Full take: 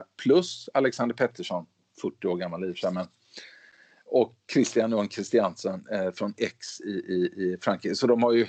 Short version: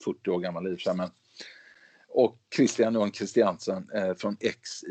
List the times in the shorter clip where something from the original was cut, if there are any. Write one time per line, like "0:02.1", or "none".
none